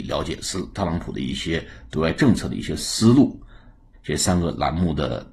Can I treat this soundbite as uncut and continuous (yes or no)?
no